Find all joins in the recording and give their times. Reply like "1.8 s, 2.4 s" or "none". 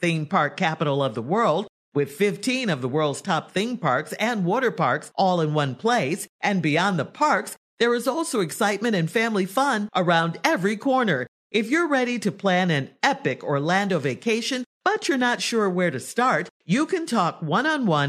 none

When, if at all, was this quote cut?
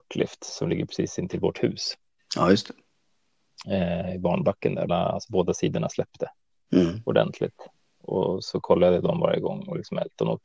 4.9 s

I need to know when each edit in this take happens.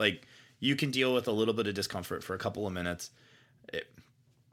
none

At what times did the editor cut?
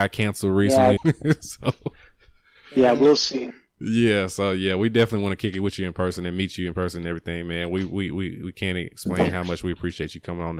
1.0 s

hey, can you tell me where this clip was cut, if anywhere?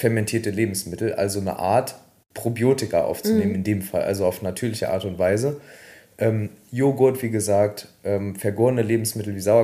none

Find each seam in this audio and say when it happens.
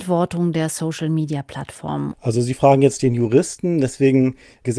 2.1 s

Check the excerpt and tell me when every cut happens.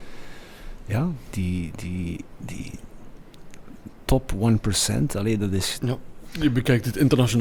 1.3 s, 5.8 s

